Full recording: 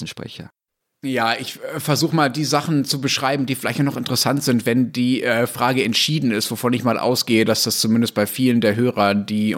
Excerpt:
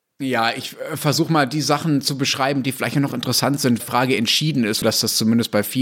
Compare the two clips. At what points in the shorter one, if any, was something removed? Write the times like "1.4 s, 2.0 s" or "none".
3.8 s, 4.8 s